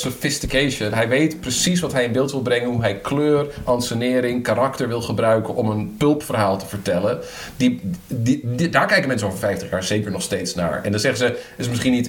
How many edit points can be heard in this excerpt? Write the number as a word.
zero